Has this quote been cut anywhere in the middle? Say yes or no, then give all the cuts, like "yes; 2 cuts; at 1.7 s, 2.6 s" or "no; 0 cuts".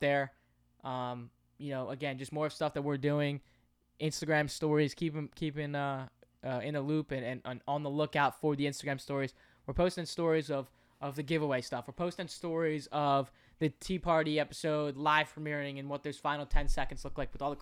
no; 0 cuts